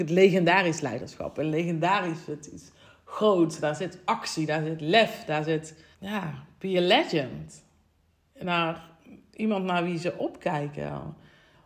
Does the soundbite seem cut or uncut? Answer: cut